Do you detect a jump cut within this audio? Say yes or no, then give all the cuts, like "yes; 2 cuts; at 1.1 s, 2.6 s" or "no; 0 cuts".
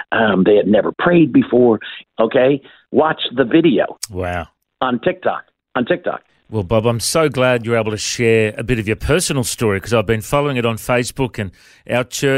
yes; 2 cuts; at 2.0 s, 6.3 s